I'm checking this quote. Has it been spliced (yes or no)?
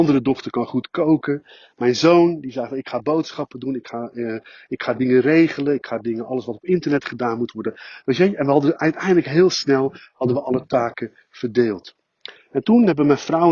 no